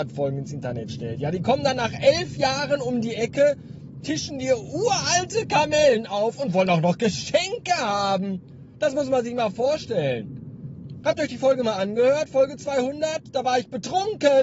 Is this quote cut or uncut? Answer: uncut